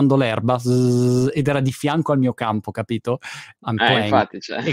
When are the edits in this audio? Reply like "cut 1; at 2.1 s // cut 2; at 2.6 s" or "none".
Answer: cut 1; at 3.6 s